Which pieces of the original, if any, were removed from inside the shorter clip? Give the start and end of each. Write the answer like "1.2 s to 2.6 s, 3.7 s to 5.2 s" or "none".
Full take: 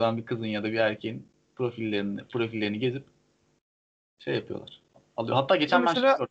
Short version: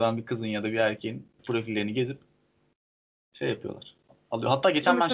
1.4 s to 2.2 s